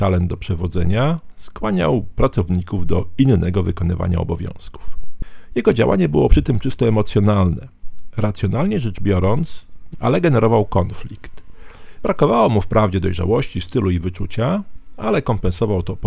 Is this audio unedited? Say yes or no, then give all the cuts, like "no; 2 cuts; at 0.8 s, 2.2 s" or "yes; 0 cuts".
no; 2 cuts; at 9.9 s, 12.0 s